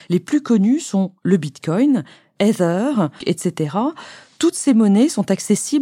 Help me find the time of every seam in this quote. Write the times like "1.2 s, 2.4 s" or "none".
3.2 s